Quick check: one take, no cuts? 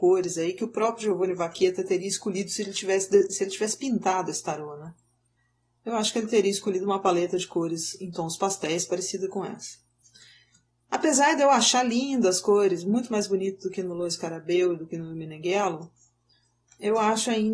yes; 0 cuts

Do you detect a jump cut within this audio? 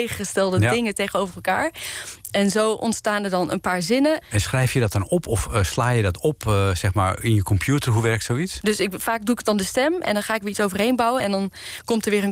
yes; 3 cuts; at 4.2 s, 8.6 s, 11.2 s

